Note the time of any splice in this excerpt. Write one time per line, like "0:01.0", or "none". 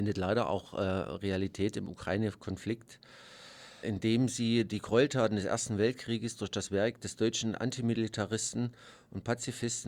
0:03.8